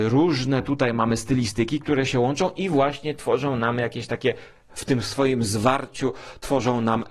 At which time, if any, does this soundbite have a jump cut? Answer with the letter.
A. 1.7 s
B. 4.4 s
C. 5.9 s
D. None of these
D